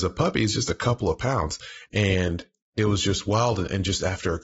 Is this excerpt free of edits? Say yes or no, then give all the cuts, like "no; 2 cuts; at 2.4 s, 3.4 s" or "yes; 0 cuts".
no; 1 cut; at 1.9 s